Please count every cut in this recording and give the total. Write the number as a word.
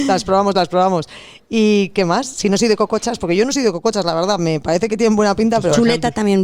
zero